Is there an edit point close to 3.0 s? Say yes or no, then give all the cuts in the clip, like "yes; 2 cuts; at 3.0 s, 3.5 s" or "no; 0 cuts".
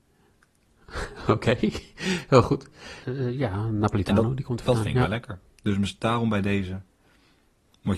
yes; 1 cut; at 3.0 s